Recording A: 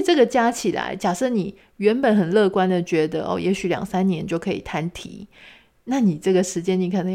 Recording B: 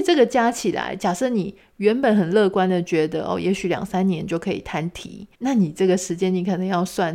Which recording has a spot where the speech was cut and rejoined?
B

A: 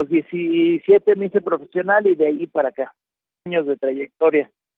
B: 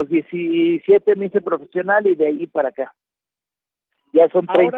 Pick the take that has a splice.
A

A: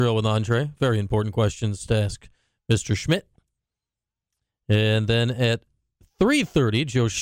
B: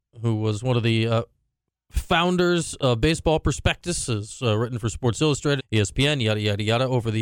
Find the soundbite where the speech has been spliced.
B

